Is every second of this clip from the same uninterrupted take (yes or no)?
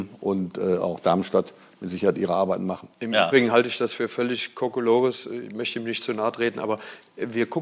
yes